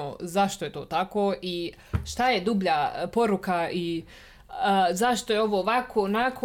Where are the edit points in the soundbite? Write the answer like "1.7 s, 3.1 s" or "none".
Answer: none